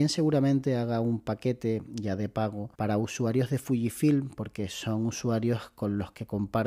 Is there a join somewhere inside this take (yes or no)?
yes